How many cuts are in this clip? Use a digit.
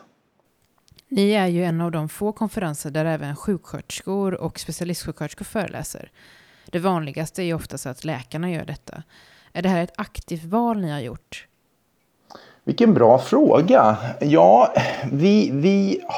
1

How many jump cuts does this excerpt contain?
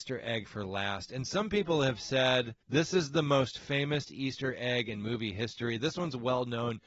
1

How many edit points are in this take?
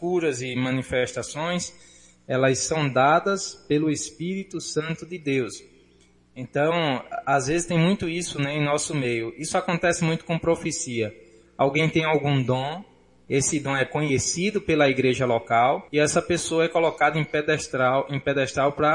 1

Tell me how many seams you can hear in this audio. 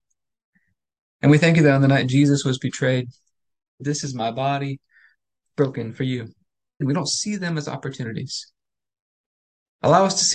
2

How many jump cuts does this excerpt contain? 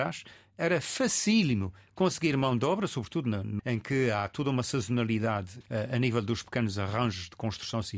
2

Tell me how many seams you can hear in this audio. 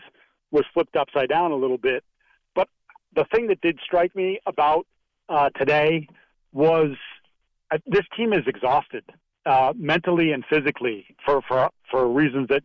0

